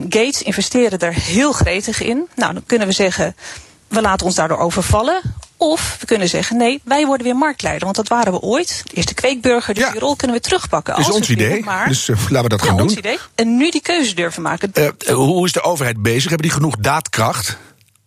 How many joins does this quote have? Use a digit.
3